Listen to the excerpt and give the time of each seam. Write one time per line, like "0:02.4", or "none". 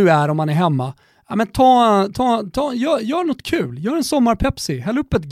none